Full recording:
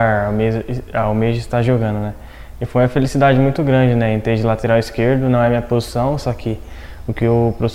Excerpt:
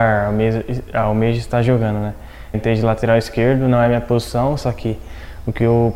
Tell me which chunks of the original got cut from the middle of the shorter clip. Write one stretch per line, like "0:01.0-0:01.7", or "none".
0:02.5-0:04.1